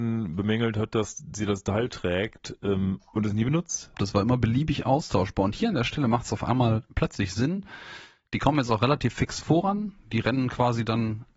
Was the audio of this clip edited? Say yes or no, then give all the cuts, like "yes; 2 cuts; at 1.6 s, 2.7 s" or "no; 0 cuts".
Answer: yes; 2 cuts; at 3.9 s, 6.9 s